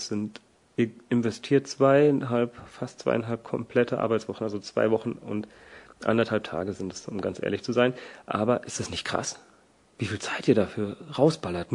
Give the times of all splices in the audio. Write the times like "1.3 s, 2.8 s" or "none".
none